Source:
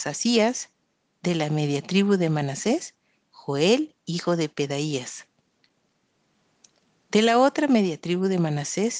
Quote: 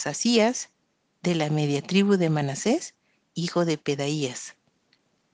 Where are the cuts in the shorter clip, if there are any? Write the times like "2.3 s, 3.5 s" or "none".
3.3 s